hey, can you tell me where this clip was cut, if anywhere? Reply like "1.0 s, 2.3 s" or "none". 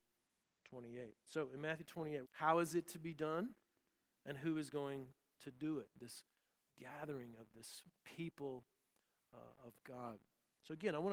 2.2 s

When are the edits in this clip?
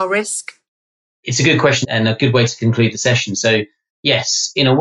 1.8 s

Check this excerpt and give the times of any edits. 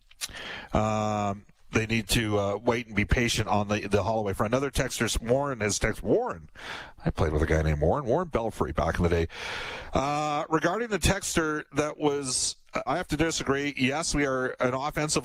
12.9 s

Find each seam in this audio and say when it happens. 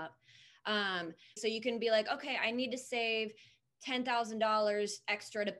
1.4 s

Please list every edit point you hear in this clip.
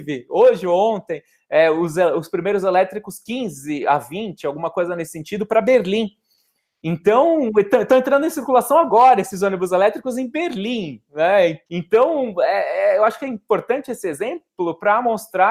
11.7 s

